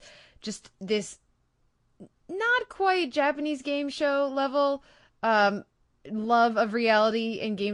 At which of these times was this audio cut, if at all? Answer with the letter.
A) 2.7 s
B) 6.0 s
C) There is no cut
C